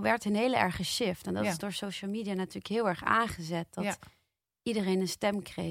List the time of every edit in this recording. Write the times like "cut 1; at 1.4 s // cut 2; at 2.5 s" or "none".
none